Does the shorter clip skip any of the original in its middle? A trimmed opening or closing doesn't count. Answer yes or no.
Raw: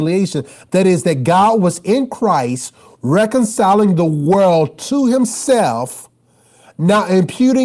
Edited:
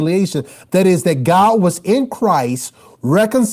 no